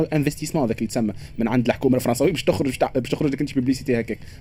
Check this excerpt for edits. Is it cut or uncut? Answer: uncut